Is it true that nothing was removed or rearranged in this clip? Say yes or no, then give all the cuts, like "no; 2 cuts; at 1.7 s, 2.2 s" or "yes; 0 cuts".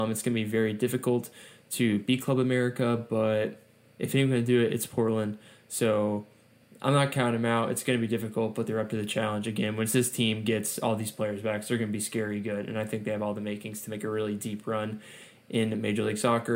yes; 0 cuts